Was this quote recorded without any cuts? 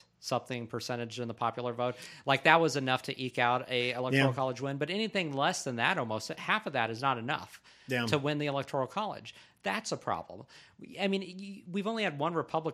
yes; 0 cuts

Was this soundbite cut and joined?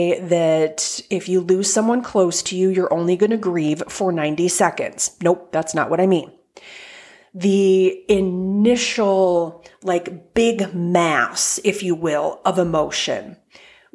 no; 0 cuts

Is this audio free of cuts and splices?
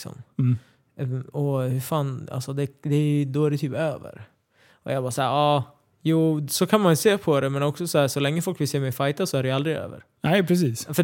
yes; 0 cuts

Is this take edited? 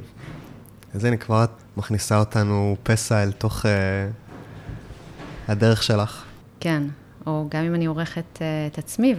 yes; 2 cuts; at 1.6 s, 6.4 s

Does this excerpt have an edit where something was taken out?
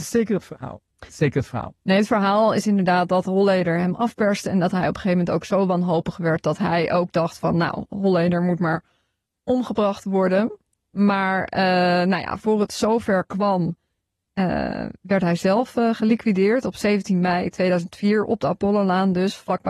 no; 0 cuts

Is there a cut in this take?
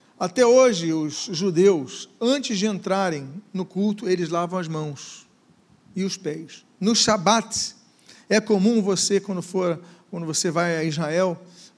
yes; 1 cut; at 6.7 s

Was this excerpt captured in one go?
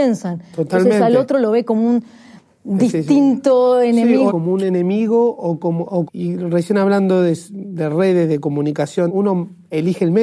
no; 3 cuts; at 4.3 s, 6.1 s, 9.1 s

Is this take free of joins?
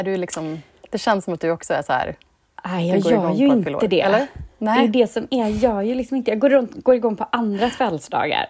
yes; 0 cuts

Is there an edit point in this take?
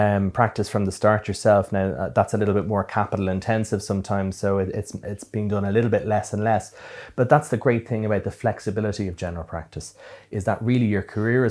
no; 0 cuts

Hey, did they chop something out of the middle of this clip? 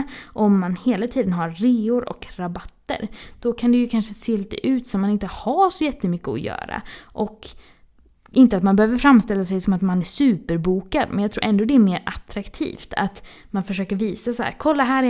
no; 0 cuts

